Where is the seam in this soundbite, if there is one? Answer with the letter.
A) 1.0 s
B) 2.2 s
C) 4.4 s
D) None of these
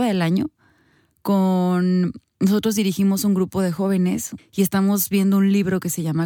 C